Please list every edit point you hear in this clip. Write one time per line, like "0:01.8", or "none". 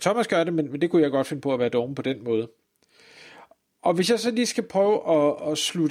none